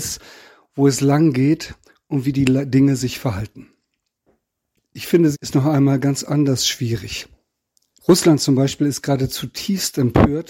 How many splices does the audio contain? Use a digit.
2